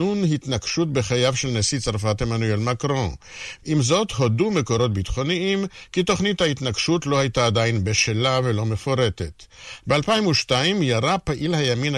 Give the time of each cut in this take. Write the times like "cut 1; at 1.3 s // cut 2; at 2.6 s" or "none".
cut 1; at 3.6 s // cut 2; at 9.8 s